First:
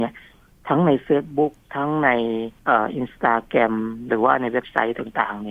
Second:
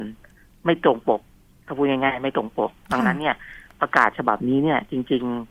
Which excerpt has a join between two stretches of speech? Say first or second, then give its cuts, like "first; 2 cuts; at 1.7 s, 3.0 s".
first; 1 cut; at 2.6 s